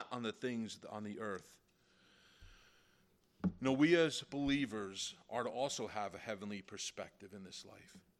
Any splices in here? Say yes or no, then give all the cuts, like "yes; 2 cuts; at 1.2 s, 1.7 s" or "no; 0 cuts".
no; 0 cuts